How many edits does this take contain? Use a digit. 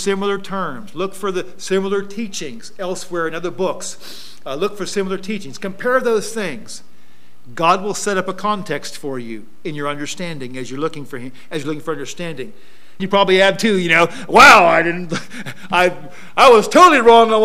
1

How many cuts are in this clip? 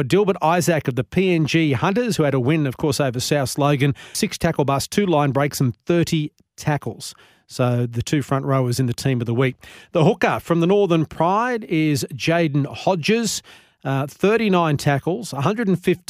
1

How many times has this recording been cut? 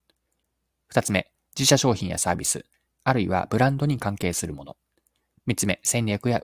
0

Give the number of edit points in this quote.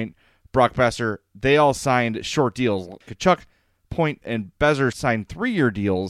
1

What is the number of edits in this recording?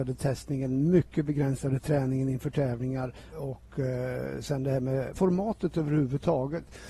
2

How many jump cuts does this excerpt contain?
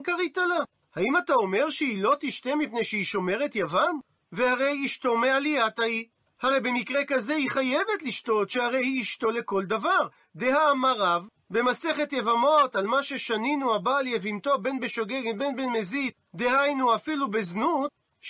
0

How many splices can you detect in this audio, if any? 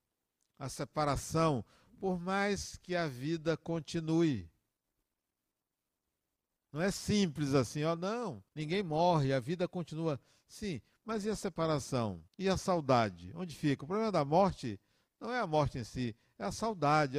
2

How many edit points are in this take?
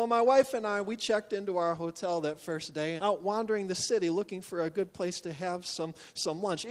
1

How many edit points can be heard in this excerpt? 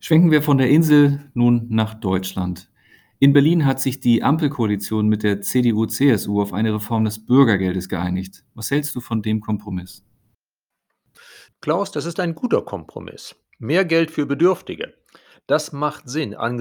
0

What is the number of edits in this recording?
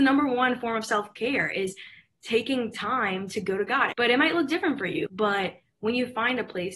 2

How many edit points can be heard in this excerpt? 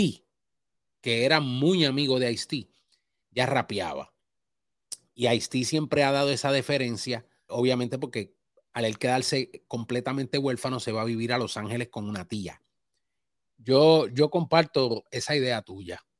2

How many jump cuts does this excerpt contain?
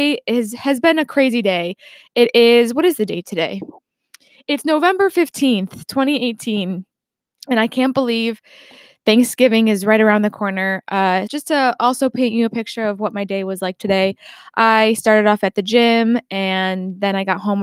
1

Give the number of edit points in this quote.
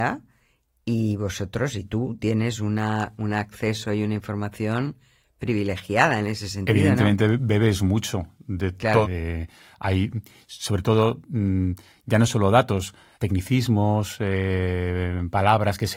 2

